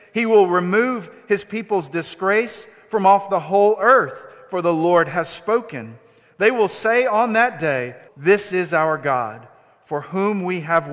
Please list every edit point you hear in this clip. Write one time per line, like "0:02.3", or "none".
0:08.1